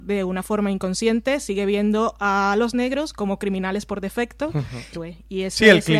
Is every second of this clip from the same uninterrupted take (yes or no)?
no